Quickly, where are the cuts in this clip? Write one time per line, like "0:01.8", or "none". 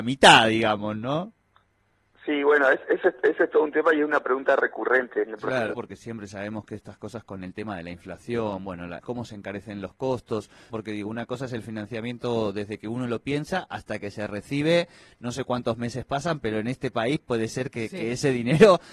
0:05.7
0:09.0
0:10.7